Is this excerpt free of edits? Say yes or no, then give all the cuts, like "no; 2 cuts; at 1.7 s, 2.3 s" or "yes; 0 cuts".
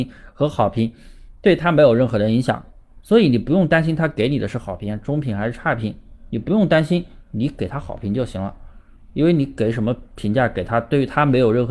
yes; 0 cuts